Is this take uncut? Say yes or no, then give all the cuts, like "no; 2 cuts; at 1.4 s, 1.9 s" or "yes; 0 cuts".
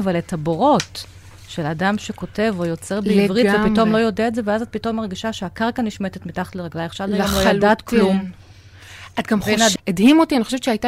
no; 1 cut; at 9.8 s